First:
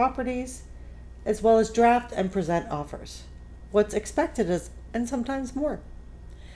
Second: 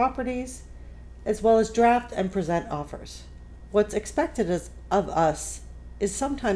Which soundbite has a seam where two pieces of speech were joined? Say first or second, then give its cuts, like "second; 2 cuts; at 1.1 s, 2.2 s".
first; 1 cut; at 4.9 s